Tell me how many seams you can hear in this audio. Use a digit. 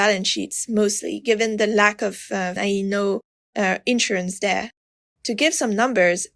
2